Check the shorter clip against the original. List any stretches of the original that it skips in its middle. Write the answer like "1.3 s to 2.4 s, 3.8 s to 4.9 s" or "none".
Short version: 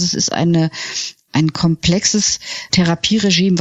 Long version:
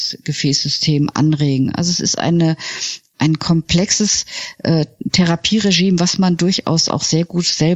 4.6 s to 5.1 s